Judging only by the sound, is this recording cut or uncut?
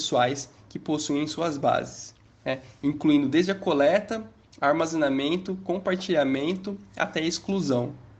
uncut